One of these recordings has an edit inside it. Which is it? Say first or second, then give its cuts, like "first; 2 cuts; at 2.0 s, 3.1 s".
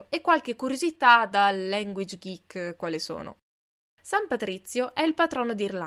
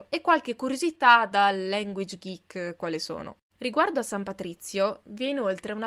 second; 1 cut; at 3.5 s